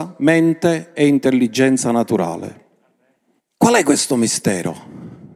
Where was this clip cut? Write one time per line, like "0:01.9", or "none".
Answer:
0:03.4